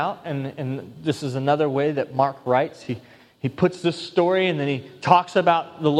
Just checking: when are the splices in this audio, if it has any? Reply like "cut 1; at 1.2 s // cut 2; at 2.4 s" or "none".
none